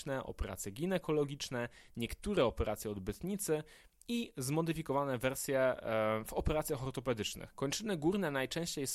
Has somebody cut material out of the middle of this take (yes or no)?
yes